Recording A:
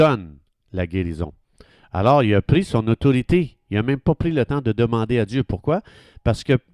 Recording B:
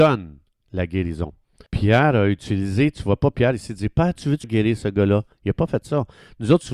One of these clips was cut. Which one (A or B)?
B